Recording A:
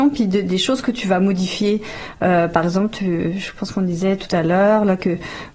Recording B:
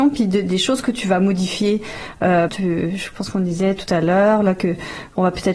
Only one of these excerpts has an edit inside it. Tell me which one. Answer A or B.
B